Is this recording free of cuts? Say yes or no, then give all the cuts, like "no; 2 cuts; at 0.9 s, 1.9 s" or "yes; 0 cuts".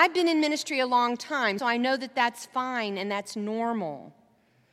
no; 1 cut; at 1.6 s